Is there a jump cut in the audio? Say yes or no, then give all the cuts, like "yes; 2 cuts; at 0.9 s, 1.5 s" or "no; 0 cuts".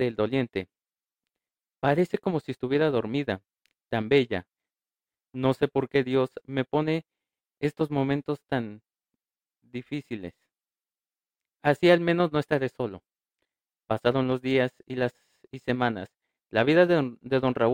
no; 0 cuts